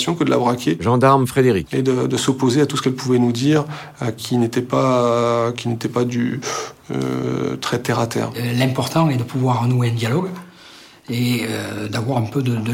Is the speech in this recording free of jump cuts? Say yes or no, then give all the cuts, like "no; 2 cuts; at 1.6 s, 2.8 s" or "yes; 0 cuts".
yes; 0 cuts